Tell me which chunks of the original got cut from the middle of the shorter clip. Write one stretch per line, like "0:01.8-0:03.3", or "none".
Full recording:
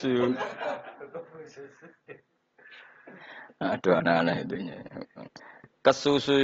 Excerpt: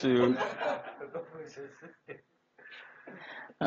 none